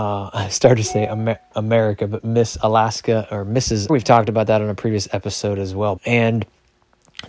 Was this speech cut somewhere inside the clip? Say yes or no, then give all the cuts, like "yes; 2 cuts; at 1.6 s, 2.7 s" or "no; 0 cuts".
yes; 2 cuts; at 3.9 s, 6.0 s